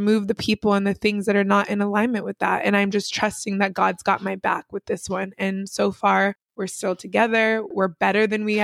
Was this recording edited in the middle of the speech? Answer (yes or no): no